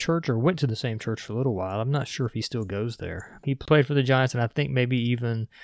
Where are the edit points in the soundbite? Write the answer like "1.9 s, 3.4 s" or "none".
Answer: 3.4 s